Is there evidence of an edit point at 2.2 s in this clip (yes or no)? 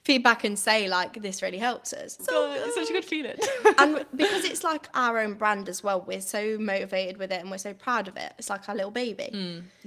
yes